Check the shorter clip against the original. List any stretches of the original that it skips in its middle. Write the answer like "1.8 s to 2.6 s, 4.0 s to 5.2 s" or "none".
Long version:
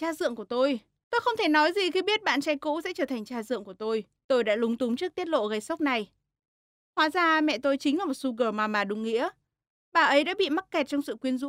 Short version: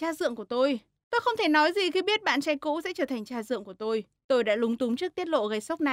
none